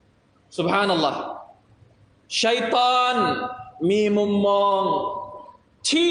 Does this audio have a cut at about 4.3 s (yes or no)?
no